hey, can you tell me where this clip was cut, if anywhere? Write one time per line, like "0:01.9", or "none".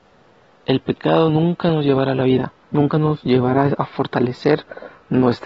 0:02.6